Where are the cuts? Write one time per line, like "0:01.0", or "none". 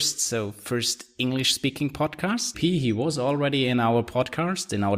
0:02.5